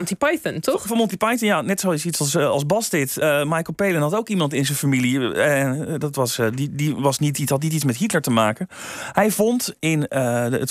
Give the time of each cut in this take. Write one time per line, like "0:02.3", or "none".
none